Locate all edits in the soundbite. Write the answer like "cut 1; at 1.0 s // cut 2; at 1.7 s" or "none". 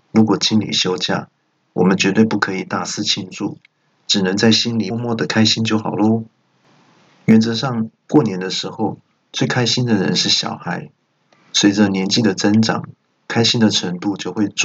cut 1; at 4.9 s